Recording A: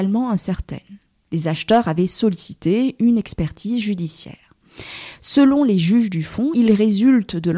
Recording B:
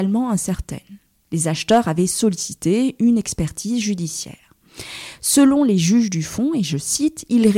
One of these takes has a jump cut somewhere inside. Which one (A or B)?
A